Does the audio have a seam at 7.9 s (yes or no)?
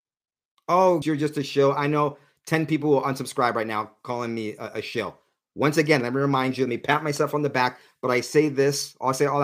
no